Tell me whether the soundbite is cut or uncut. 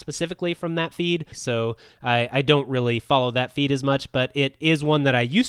cut